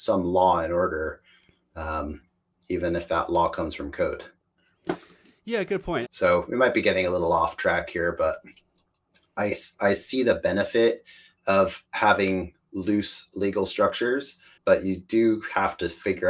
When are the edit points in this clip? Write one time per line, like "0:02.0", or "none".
0:06.0
0:14.6